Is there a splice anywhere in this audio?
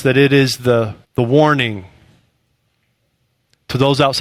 yes; 1 cut; at 1.0 s

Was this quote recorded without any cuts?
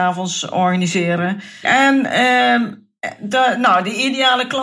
no; 1 cut; at 1.6 s

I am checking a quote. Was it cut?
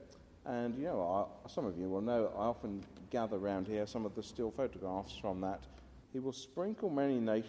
yes; 1 cut; at 6.0 s

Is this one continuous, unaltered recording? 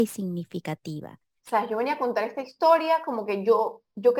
no; 1 cut; at 1.4 s

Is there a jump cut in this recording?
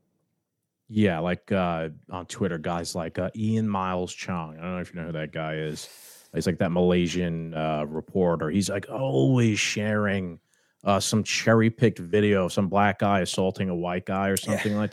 no; 0 cuts

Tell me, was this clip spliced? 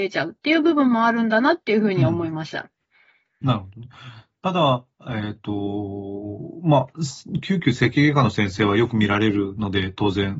no; 0 cuts

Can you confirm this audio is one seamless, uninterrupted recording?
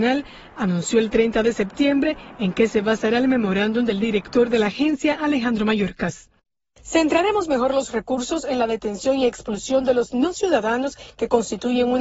yes; 0 cuts

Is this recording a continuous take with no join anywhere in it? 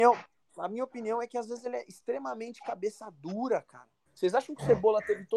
no; 1 cut; at 4.1 s

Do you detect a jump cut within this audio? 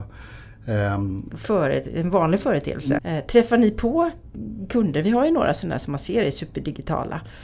yes; 2 cuts; at 1.3 s, 3.0 s

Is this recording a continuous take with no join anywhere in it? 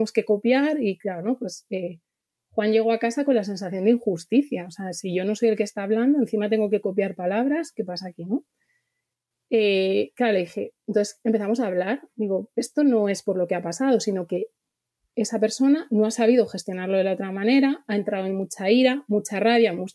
yes; 0 cuts

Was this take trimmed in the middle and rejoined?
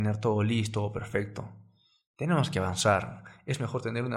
no; 0 cuts

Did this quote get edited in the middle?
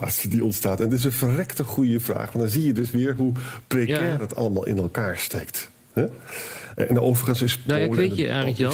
no; 0 cuts

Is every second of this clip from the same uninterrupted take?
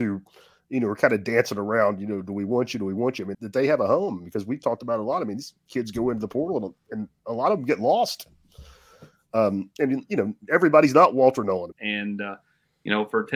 no; 2 cuts; at 3.3 s, 11.7 s

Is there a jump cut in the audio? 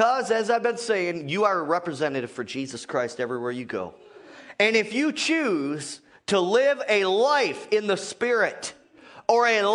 no; 0 cuts

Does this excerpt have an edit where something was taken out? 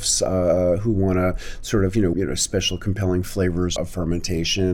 yes; 2 cuts; at 2.1 s, 3.8 s

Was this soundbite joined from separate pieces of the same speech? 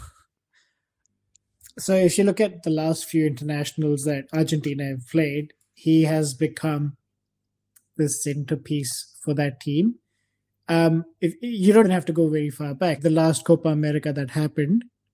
yes; 2 cuts; at 11.8 s, 13.0 s

